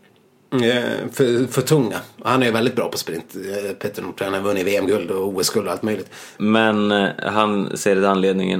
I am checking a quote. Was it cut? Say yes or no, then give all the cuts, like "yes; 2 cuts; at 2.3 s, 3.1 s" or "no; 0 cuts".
yes; 1 cut; at 6.4 s